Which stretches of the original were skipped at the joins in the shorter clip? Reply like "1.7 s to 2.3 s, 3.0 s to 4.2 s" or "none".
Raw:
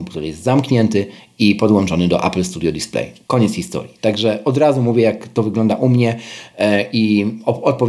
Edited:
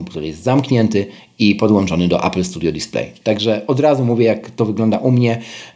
3.2 s to 4.0 s